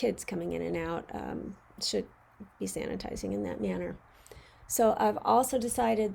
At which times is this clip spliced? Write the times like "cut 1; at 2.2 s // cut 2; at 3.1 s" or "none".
none